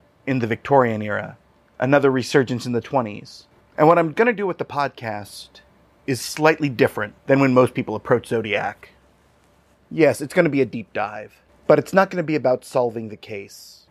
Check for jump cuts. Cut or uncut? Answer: cut